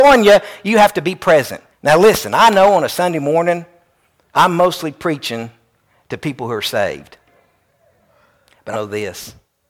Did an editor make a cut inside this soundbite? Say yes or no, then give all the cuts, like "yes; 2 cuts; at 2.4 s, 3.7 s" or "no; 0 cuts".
yes; 2 cuts; at 1.7 s, 8.7 s